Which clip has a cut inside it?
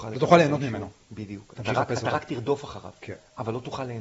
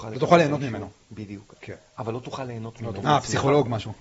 second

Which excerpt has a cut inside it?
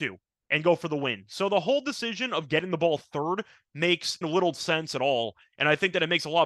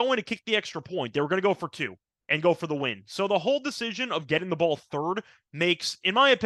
first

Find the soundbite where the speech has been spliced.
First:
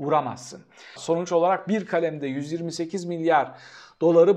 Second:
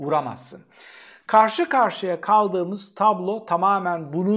first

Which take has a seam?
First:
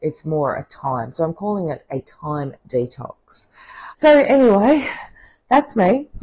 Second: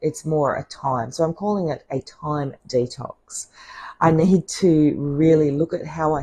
first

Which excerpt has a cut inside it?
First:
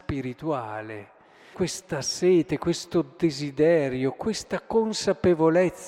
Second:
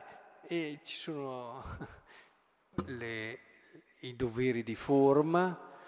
first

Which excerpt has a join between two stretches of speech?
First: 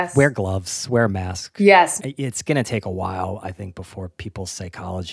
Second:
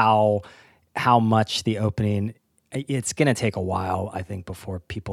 first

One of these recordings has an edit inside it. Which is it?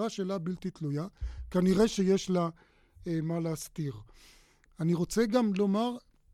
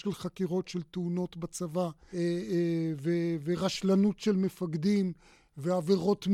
second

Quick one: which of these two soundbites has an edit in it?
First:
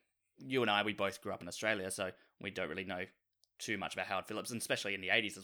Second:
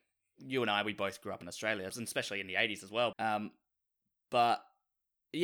second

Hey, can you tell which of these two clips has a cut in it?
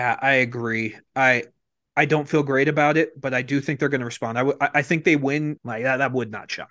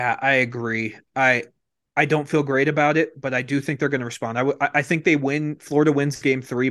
first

